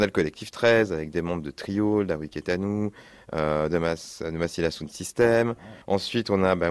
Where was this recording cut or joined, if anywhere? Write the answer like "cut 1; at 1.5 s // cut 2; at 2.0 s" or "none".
cut 1; at 5.8 s